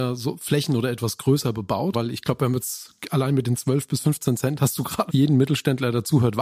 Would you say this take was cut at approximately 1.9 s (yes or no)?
yes